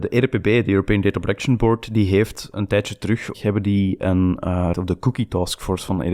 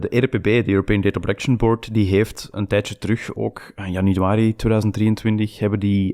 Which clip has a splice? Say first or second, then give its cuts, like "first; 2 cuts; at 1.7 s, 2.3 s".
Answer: first; 2 cuts; at 3.3 s, 4.7 s